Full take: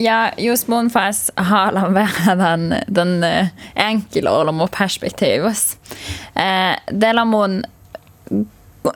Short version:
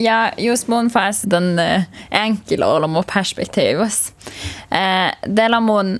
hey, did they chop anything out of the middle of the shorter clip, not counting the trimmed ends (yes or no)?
yes